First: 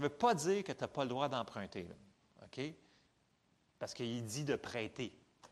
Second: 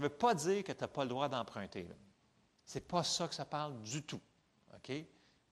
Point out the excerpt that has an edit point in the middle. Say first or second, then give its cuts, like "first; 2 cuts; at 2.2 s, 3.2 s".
first; 1 cut; at 2.3 s